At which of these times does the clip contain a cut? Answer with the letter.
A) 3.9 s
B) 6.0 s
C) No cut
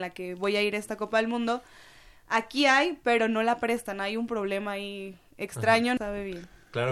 B